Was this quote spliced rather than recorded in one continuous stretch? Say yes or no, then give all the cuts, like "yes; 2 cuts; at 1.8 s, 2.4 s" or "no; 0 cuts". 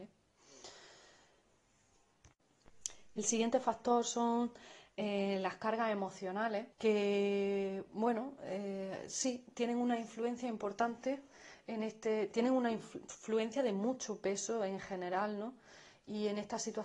yes; 1 cut; at 6.7 s